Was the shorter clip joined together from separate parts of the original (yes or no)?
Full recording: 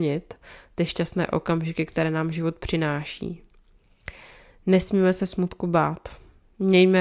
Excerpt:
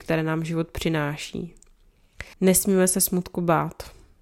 yes